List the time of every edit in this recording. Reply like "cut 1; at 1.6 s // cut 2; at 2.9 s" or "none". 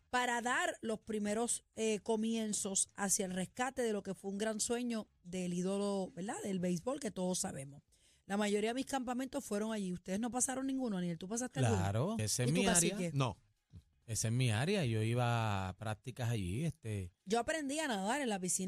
cut 1; at 12.2 s